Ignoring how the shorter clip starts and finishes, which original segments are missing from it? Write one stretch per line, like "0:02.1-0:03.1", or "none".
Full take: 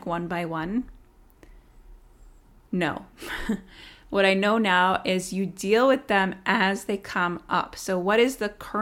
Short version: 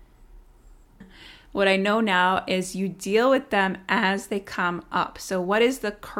0:02.6-0:03.6